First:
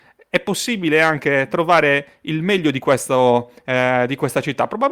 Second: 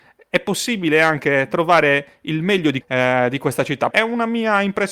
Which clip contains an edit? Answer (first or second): second